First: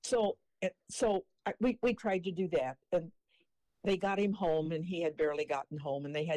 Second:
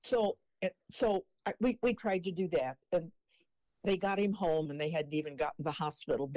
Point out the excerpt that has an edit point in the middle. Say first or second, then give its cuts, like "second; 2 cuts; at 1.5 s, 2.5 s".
second; 1 cut; at 4.6 s